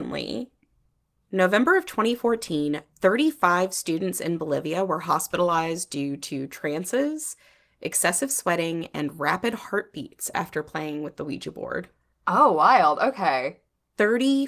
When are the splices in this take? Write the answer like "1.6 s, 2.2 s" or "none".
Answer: none